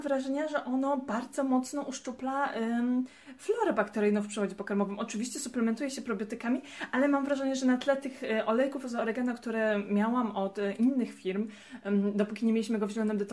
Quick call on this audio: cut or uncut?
uncut